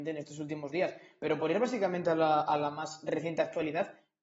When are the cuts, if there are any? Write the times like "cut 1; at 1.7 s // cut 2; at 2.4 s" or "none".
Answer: none